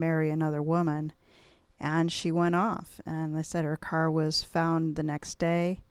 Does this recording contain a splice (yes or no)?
no